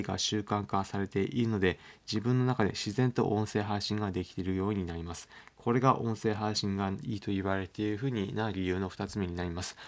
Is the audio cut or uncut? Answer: uncut